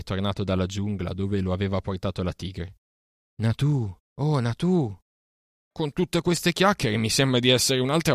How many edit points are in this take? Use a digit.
2